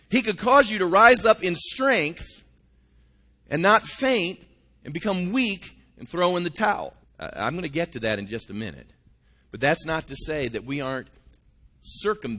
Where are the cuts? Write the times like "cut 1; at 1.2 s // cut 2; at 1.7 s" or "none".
cut 1; at 7.0 s